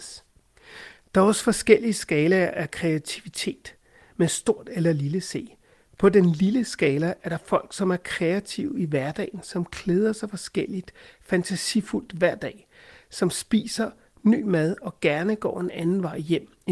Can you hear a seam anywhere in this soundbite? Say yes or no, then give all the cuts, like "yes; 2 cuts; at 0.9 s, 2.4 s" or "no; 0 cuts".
no; 0 cuts